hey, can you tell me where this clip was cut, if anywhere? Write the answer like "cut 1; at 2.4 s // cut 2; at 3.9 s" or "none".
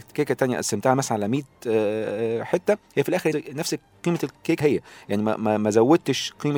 cut 1; at 3.3 s // cut 2; at 4.6 s